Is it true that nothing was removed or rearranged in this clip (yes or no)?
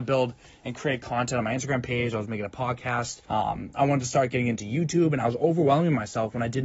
no